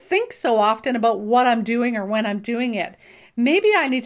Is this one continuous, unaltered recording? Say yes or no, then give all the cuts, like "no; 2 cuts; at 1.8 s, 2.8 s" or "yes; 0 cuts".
yes; 0 cuts